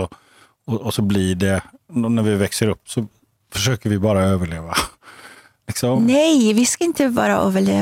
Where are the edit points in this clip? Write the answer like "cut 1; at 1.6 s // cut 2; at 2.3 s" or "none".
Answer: none